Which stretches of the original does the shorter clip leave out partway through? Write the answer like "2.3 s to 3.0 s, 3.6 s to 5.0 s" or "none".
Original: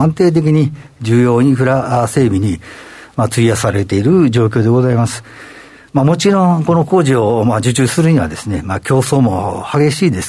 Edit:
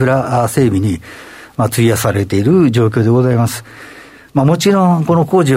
none